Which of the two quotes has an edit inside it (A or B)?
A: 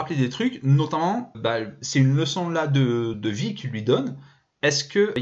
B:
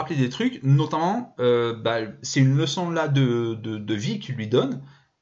A